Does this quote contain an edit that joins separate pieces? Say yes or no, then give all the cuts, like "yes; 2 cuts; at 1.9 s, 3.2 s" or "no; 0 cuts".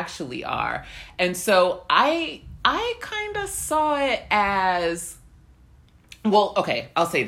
no; 0 cuts